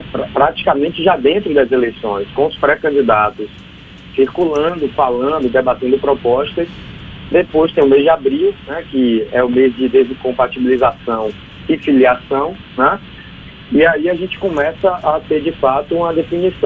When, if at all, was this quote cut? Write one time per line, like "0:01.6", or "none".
none